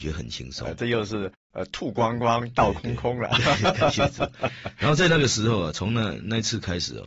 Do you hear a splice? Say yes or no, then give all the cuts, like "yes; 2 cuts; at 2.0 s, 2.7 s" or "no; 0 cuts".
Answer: no; 0 cuts